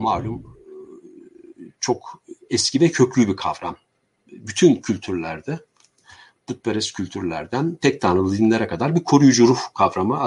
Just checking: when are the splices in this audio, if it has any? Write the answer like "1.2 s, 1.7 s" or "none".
none